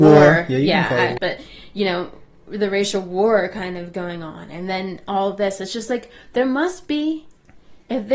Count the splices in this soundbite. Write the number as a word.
one